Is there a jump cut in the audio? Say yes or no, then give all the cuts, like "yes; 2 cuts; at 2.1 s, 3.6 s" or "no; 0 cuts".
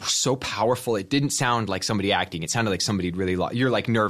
no; 0 cuts